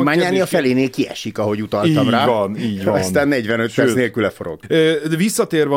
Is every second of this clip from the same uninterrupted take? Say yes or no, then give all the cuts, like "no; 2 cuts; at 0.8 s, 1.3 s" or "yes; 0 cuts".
yes; 0 cuts